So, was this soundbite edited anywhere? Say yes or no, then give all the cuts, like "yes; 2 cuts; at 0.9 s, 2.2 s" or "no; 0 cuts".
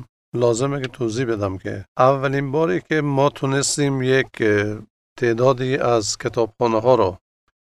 yes; 1 cut; at 1.9 s